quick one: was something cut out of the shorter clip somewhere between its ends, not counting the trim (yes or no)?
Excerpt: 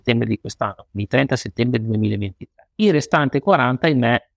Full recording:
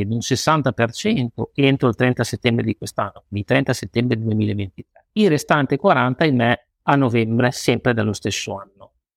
no